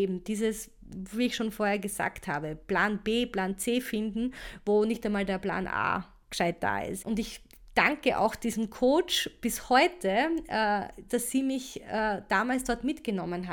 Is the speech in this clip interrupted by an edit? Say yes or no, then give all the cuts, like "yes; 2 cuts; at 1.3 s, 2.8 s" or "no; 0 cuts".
yes; 2 cuts; at 7.0 s, 11.1 s